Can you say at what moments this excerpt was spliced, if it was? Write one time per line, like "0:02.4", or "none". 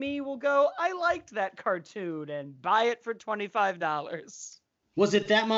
none

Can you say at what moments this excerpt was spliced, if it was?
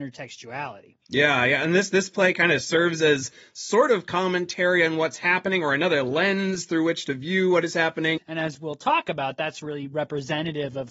0:01.0
0:08.2

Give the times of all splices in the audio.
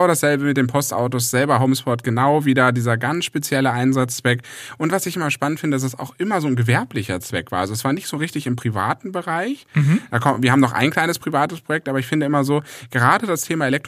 none

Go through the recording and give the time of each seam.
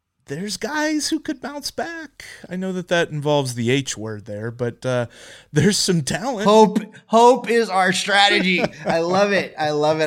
none

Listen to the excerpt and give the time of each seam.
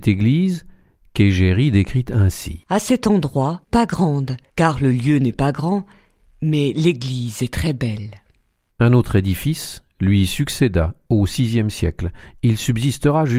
0:03.7
0:08.7

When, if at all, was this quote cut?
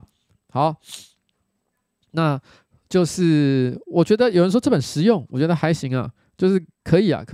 none

